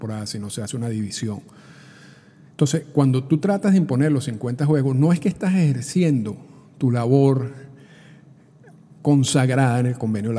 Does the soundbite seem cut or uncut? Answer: uncut